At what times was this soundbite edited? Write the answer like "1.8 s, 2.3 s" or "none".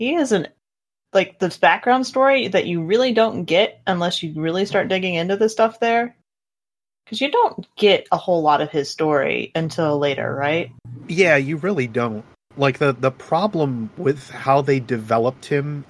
none

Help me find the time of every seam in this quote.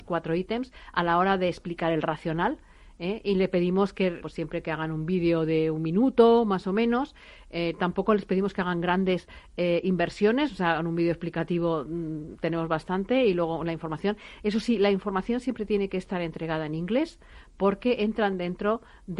4.2 s

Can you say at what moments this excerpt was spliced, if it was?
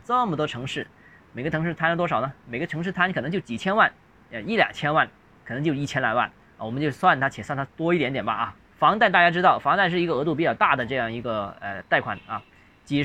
8.6 s

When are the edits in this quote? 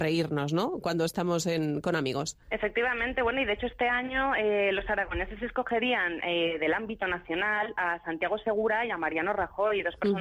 2.4 s, 6.2 s

